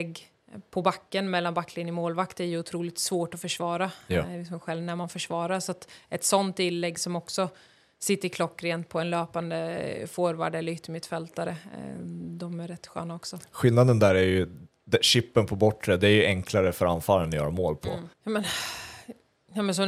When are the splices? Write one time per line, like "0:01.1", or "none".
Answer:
0:18.1